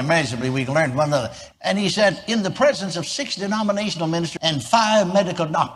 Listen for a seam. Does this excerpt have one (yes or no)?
yes